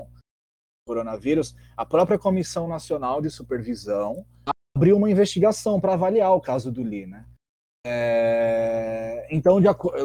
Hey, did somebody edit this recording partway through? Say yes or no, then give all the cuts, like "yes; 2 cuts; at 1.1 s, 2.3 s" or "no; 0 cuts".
yes; 1 cut; at 7.7 s